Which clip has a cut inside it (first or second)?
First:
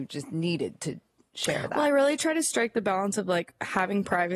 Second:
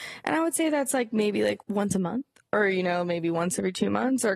second